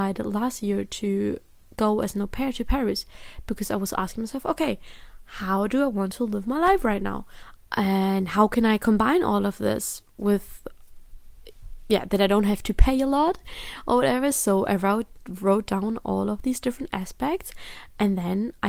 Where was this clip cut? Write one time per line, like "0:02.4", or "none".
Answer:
0:07.6